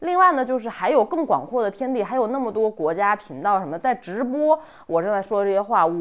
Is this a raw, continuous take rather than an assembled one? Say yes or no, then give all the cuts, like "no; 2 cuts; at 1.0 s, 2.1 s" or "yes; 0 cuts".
yes; 0 cuts